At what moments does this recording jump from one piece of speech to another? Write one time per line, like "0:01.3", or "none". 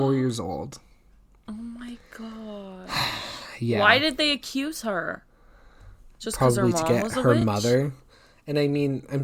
none